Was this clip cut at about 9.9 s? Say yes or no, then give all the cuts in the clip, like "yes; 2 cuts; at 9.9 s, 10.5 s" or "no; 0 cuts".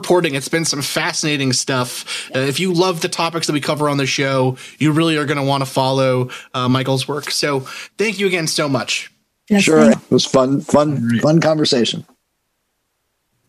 yes; 1 cut; at 9.9 s